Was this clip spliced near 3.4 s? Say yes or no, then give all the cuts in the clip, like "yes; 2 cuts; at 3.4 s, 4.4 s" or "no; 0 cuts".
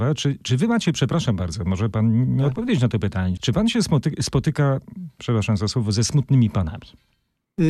yes; 1 cut; at 3.4 s